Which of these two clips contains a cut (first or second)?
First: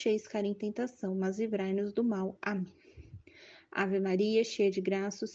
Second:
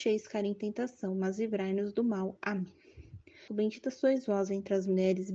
second